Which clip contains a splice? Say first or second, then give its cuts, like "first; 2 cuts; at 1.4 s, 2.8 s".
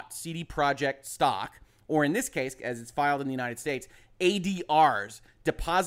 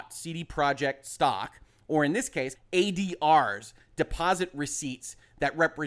second; 1 cut; at 2.6 s